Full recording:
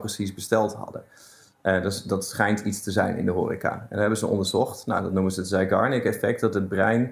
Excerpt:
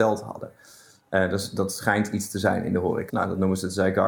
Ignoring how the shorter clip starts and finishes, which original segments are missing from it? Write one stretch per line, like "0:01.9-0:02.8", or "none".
0:03.6-0:04.8